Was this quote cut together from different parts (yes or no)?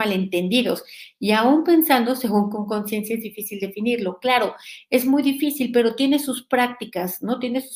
no